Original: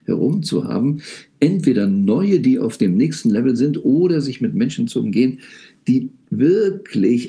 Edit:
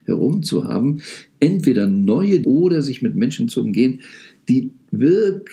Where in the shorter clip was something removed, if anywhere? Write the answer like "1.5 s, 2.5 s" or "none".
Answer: 2.4 s